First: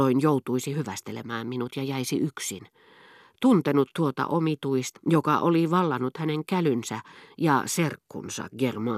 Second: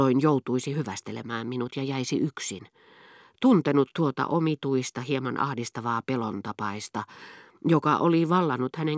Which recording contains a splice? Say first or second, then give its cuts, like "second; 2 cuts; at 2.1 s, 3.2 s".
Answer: first; 1 cut; at 4.9 s